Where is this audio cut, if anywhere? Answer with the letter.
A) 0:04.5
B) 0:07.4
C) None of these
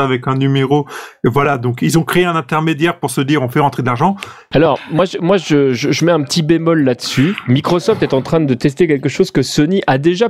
A